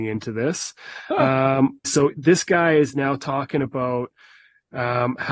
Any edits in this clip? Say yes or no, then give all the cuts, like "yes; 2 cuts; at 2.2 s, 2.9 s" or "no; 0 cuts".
yes; 1 cut; at 1.8 s